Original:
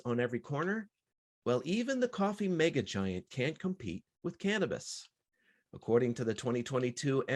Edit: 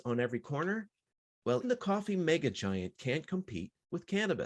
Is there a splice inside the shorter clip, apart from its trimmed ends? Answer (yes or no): yes